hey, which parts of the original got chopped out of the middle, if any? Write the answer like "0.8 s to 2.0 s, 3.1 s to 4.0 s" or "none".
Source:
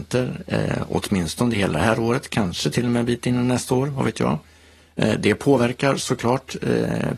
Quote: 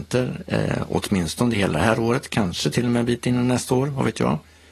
none